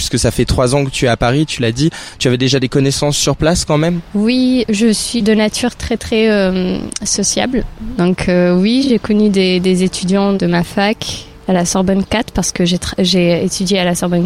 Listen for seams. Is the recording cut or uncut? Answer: cut